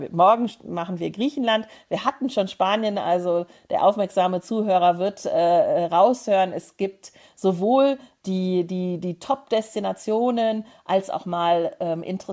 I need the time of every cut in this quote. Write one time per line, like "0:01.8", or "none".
none